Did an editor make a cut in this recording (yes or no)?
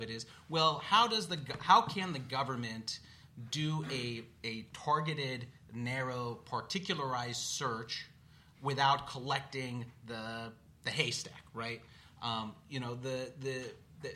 no